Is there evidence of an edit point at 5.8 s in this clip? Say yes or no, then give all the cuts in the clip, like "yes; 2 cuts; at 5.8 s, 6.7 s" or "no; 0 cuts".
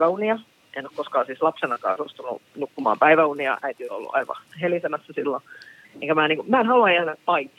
yes; 1 cut; at 5.8 s